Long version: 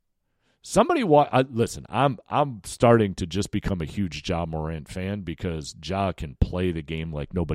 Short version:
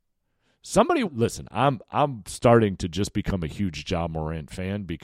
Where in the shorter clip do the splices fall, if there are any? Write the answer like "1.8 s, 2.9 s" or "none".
1.0 s